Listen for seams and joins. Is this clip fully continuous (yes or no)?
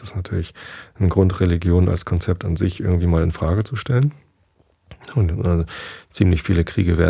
yes